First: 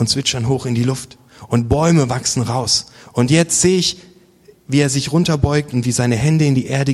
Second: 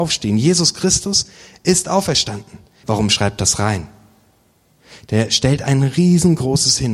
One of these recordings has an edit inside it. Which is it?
second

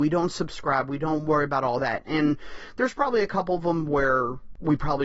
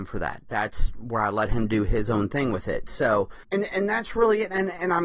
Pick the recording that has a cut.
second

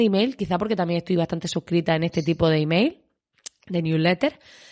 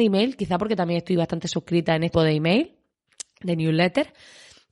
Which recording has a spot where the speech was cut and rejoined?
second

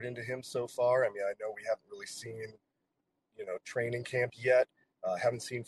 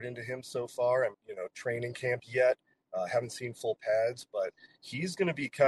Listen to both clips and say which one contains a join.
second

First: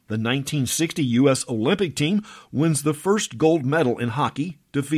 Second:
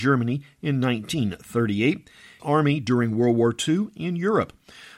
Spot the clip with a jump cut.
second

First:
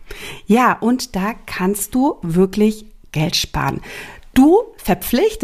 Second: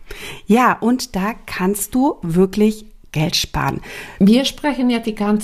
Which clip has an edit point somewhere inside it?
second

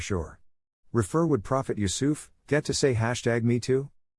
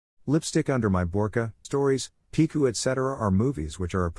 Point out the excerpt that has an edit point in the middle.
second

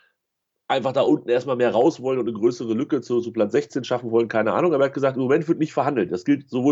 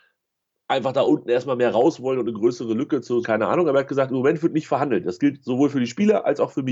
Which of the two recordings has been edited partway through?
second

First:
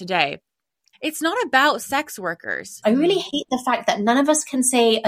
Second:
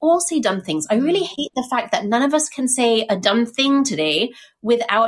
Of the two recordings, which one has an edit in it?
first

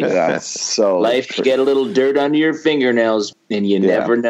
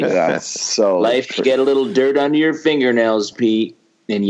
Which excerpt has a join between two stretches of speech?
first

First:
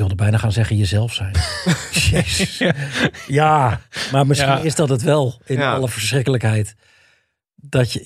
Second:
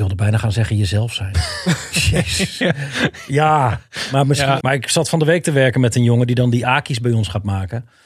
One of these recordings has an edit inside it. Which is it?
second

